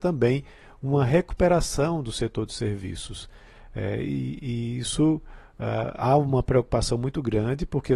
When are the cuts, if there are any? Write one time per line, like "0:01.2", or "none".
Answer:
none